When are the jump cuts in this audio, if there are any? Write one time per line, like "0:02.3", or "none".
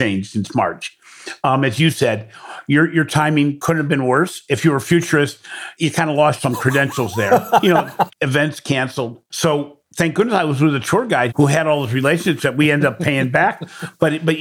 0:08.1
0:09.3
0:11.3